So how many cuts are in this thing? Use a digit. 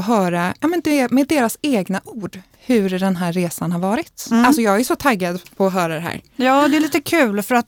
0